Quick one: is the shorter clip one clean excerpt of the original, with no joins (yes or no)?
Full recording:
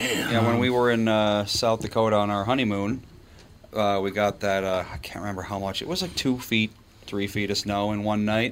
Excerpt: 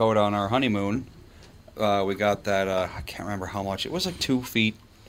yes